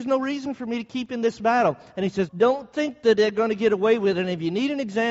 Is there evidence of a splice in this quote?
yes; 1 cut; at 2.3 s

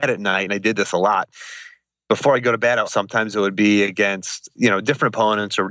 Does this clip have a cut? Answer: yes; 2 cuts; at 2.9 s, 4.5 s

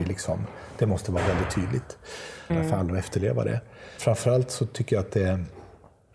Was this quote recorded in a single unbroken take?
no; 2 cuts; at 2.5 s, 4.0 s

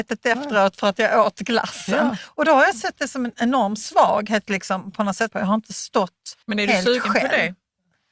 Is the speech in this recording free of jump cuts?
no; 2 cuts; at 5.3 s, 6.4 s

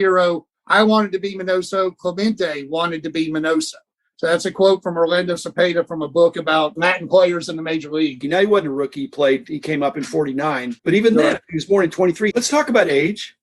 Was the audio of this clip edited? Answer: yes; 3 cuts; at 8.2 s, 10.8 s, 12.3 s

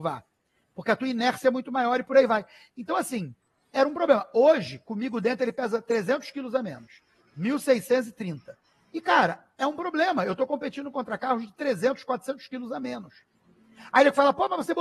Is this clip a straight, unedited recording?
yes; 0 cuts

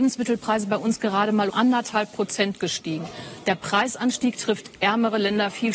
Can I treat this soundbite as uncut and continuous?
no; 1 cut; at 1.5 s

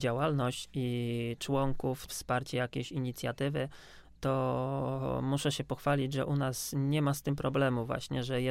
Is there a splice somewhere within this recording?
yes; 1 cut; at 2.1 s

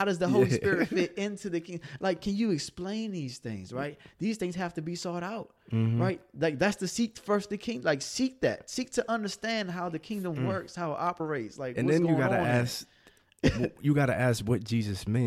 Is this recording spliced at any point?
no; 0 cuts

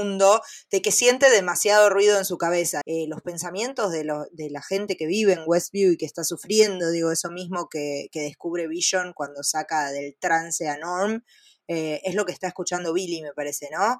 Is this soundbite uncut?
no; 1 cut; at 2.8 s

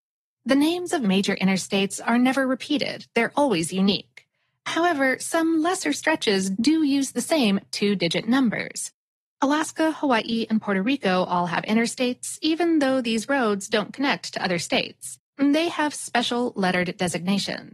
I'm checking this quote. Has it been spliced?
yes; 2 cuts; at 9.2 s, 15.3 s

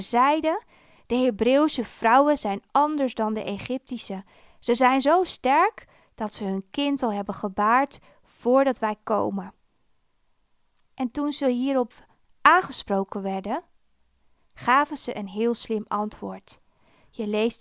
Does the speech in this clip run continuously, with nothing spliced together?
no; 1 cut; at 10.9 s

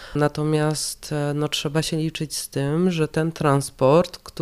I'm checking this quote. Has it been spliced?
no; 0 cuts

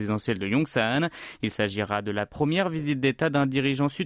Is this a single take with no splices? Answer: yes; 0 cuts

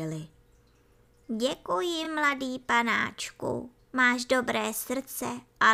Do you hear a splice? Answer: no; 0 cuts

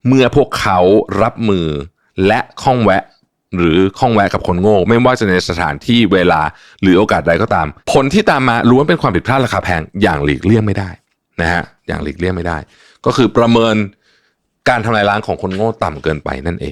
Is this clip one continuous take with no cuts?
no; 1 cut; at 7.8 s

